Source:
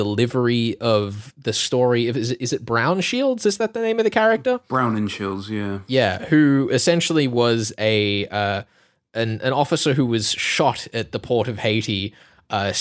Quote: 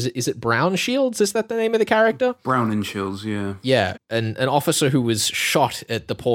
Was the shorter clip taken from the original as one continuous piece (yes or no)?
no